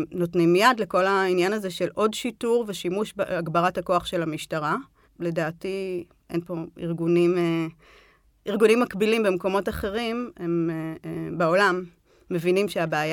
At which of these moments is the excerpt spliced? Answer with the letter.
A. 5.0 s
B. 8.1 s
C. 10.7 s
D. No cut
A